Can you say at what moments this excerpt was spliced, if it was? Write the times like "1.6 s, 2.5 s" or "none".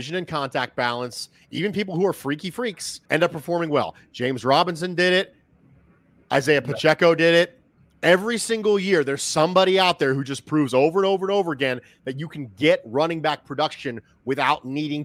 3.1 s

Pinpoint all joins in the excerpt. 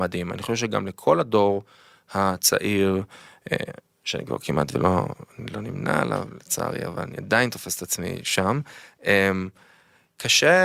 none

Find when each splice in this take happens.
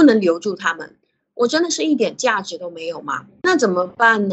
3.4 s

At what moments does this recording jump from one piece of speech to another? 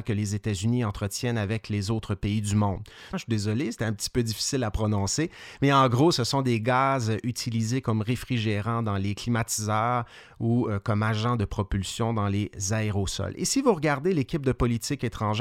3.1 s

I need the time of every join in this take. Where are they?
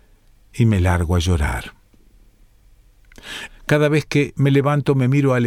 3.5 s

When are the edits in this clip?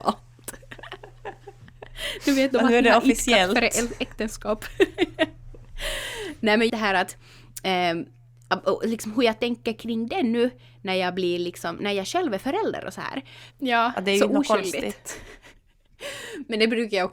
6.7 s, 13.5 s

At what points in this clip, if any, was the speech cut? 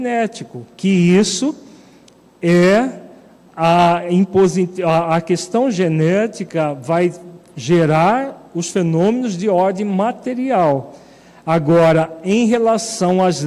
none

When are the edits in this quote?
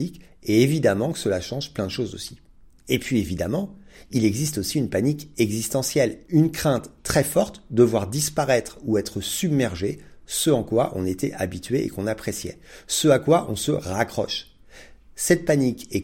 6.3 s

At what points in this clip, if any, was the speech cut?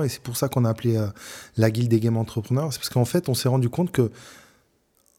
none

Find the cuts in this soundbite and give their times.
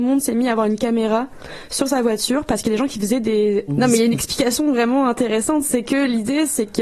3.7 s

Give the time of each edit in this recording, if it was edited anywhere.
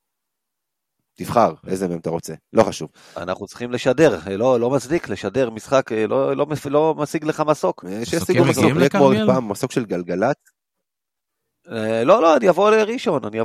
none

